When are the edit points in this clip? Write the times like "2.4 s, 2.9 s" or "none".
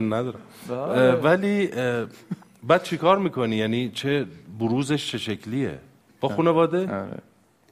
6.0 s